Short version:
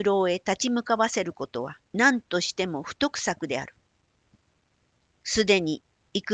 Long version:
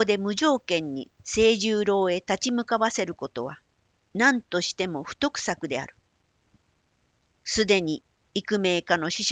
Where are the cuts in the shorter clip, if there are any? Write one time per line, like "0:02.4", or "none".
0:01.9